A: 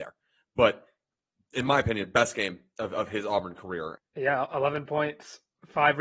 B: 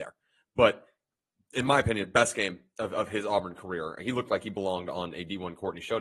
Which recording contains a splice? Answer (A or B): A